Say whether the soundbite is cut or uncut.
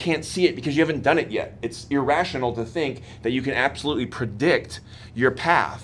uncut